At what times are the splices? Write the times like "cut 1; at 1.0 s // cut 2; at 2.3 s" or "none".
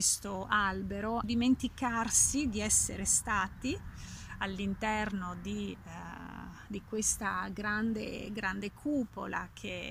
cut 1; at 1.2 s